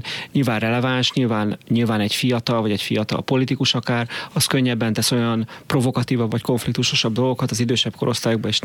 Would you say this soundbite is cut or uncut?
uncut